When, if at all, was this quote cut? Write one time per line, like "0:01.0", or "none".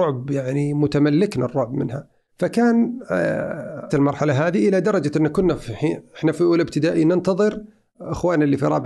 0:03.9